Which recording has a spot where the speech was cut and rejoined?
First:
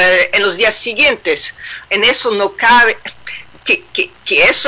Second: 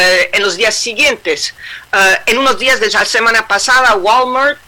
first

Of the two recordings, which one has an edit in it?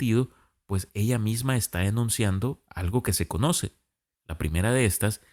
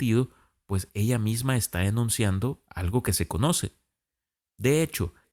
first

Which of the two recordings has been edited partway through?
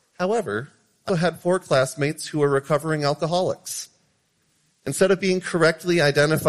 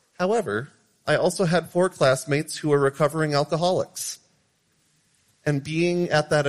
first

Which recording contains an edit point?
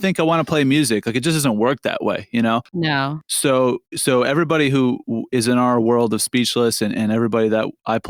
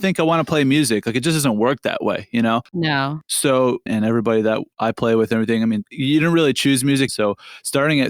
second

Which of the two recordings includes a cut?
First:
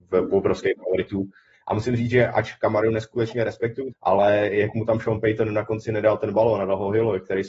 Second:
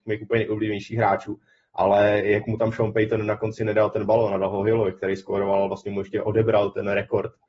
first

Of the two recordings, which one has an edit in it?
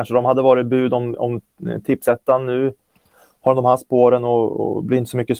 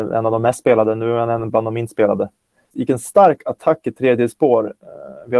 second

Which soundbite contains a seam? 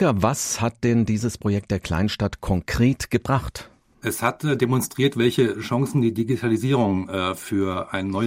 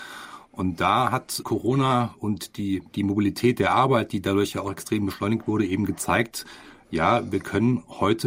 second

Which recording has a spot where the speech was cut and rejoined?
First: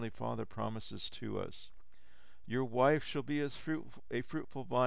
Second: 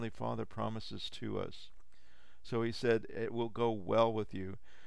first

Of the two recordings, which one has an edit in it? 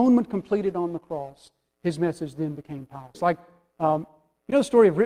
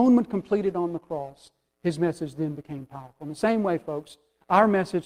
first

